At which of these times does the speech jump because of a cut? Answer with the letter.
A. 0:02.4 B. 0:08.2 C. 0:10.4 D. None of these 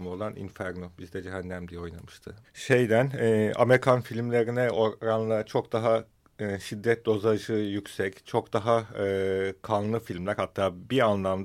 A